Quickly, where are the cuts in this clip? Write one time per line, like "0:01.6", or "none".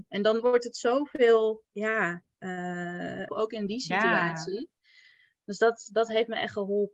0:03.3